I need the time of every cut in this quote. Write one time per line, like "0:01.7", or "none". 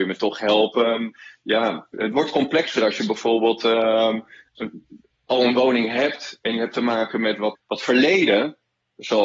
0:01.9
0:07.5